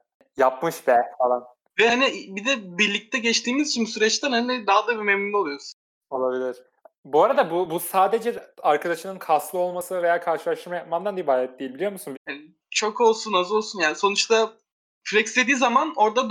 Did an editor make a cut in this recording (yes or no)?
yes